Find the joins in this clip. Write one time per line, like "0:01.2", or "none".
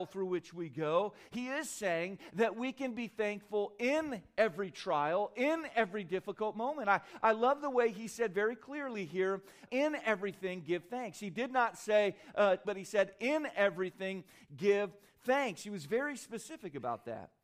0:09.7
0:12.6

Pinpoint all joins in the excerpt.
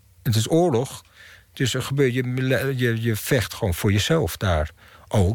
none

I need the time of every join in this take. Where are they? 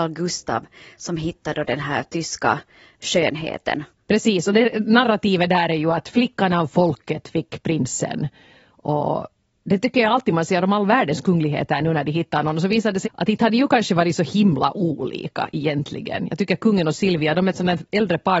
0:13.0

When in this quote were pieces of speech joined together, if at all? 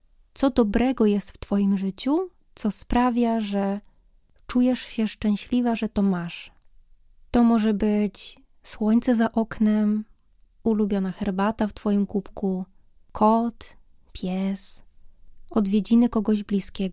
none

